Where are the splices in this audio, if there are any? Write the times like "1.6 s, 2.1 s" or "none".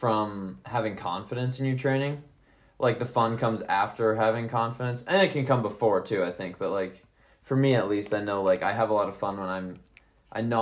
none